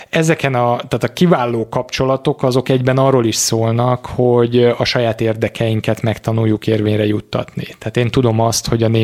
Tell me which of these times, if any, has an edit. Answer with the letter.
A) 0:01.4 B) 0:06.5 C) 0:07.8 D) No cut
C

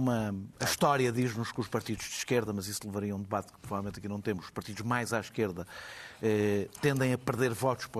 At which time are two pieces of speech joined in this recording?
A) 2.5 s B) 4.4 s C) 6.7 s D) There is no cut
D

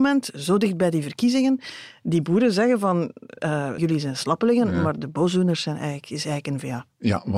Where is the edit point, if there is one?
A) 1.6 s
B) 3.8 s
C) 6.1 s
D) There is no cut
B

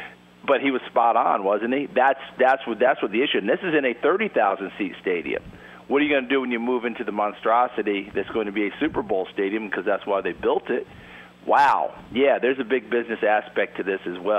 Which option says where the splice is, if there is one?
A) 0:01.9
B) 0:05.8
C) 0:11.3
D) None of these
D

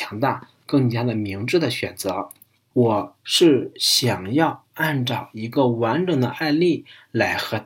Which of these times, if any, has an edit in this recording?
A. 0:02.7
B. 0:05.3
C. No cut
A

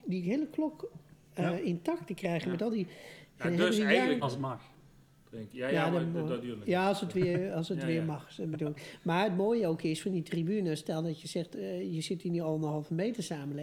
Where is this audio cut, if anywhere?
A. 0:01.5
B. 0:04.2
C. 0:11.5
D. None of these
B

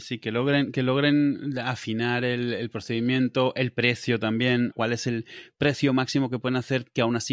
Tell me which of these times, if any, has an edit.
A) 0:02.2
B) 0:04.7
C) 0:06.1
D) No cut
B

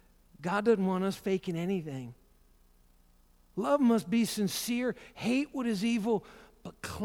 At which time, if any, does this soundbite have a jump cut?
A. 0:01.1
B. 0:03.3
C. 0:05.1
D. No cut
D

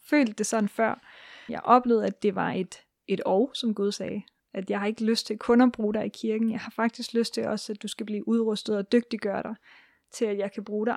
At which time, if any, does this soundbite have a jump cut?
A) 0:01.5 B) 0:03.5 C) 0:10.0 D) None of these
A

